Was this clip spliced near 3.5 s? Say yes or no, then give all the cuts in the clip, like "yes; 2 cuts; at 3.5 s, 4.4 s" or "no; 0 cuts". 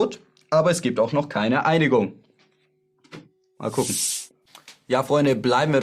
no; 0 cuts